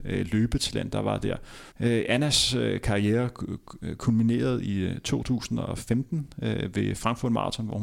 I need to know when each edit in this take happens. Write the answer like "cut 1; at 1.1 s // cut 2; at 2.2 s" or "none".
cut 1; at 1.7 s